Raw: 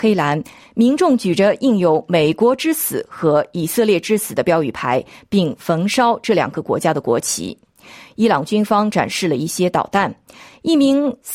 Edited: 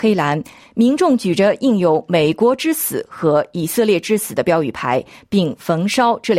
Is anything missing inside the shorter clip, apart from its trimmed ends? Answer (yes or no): no